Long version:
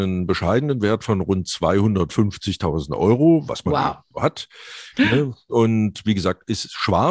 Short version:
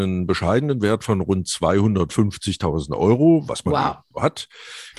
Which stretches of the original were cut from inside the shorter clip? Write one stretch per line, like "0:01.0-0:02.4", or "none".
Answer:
none